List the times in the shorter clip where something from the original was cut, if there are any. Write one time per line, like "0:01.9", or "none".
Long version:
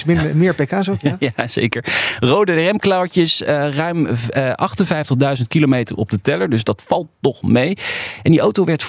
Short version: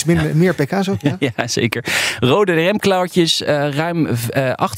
none